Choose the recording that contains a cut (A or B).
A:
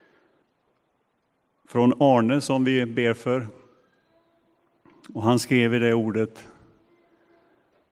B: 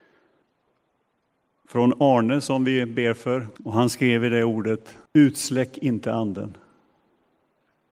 B